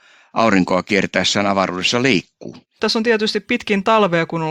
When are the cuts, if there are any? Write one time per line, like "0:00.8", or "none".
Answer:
0:02.8